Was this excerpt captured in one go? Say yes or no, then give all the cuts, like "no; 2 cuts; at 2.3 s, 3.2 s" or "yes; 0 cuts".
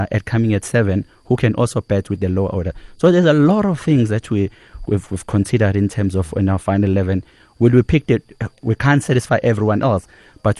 no; 1 cut; at 4.8 s